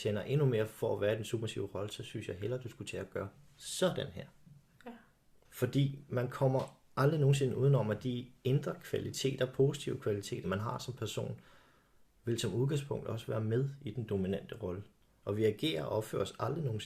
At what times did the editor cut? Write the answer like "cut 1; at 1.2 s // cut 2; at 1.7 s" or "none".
cut 1; at 5.4 s // cut 2; at 10.4 s // cut 3; at 15.2 s